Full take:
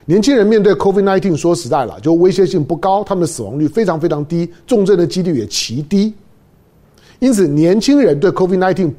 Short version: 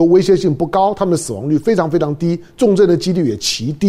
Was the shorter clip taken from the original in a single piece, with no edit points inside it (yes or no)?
yes